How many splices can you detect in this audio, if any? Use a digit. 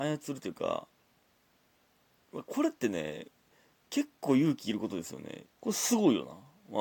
1